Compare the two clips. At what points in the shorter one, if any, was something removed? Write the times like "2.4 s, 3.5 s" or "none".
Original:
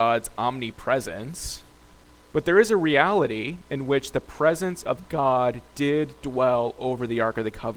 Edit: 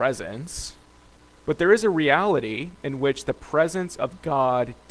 none